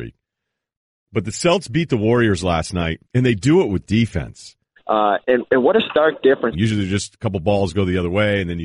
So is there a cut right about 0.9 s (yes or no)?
no